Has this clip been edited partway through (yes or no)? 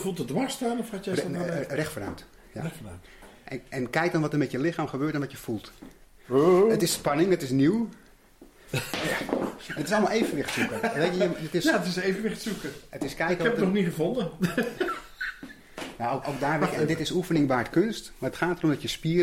no